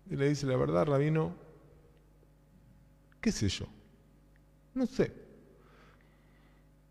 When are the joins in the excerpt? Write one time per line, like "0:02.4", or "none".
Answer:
none

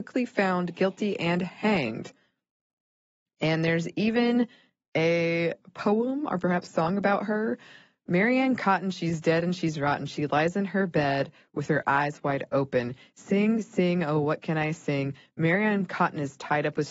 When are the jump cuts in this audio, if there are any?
none

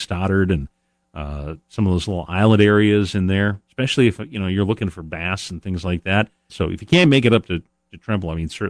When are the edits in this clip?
0:06.5

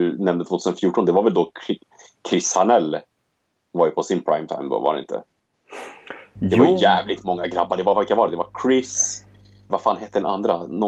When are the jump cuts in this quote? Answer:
0:09.7

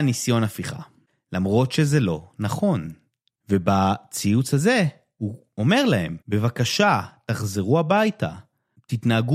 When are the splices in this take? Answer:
0:03.3
0:06.2

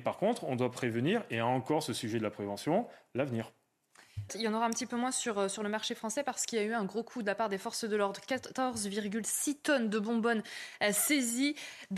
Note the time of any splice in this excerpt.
0:04.3

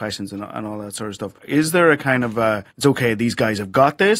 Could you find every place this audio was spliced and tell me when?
0:01.4
0:02.7

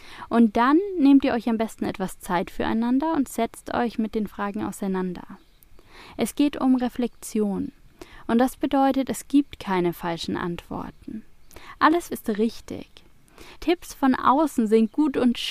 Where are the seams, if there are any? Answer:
0:12.1
0:13.6

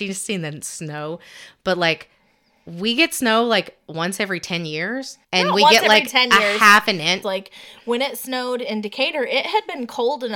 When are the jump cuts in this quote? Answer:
0:05.2
0:07.2

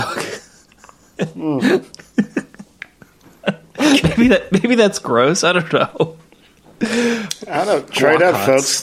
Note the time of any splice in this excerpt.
none

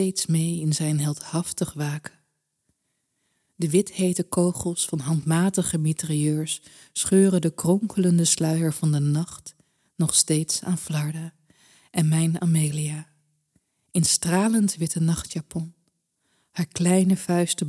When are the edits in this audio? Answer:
none

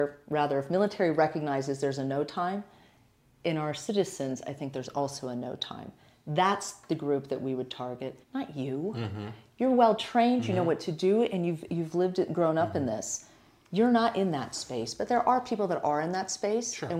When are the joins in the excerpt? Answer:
0:08.2

